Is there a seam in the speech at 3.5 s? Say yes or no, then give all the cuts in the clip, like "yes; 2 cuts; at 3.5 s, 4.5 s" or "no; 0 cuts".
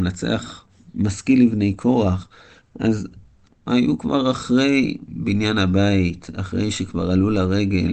yes; 1 cut; at 3.5 s